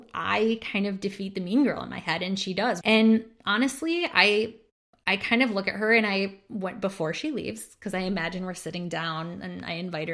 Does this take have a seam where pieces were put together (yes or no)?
yes